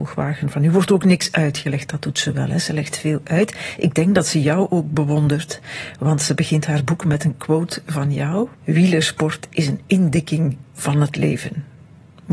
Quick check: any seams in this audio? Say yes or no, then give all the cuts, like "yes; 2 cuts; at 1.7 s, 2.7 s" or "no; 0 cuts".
yes; 1 cut; at 8.5 s